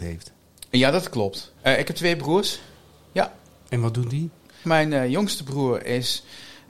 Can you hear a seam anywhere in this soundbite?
yes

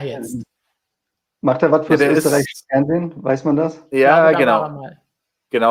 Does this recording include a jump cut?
no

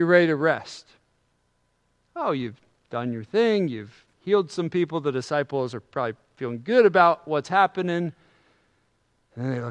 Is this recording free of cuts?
yes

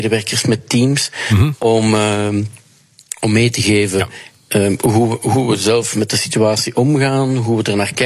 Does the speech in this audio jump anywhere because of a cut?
no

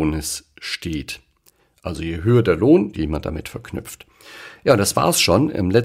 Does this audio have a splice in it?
yes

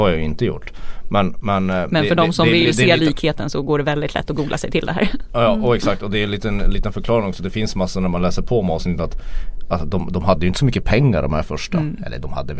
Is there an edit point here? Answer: no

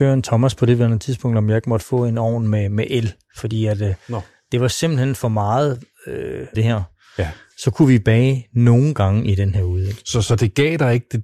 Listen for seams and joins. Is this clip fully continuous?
no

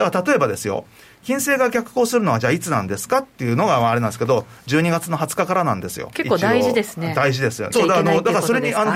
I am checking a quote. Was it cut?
yes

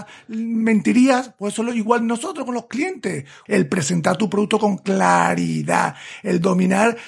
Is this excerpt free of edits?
no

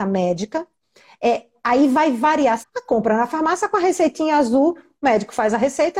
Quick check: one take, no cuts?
no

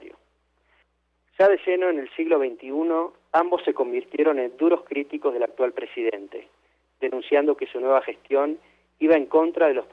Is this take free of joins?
yes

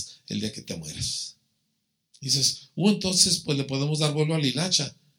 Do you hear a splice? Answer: no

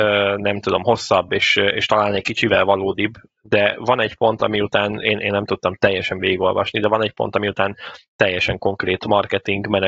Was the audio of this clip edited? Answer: yes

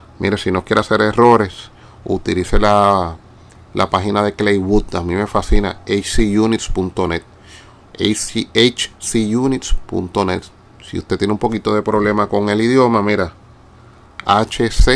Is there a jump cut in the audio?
no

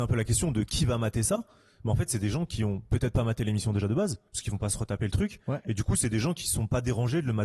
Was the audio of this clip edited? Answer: no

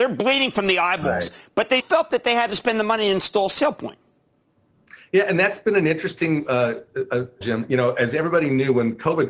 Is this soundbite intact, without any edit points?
no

